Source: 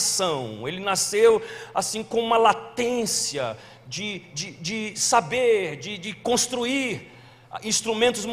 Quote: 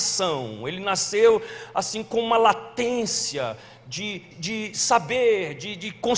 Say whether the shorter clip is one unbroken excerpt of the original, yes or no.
no